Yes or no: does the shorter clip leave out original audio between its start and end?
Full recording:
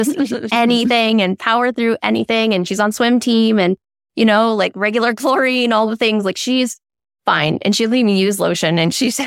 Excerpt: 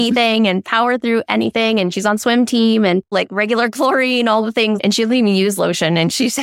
yes